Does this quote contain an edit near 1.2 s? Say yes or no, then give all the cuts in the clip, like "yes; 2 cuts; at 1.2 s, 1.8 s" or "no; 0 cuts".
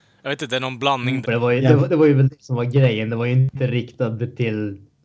yes; 1 cut; at 1.2 s